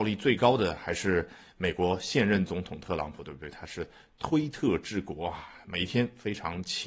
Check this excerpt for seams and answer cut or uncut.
uncut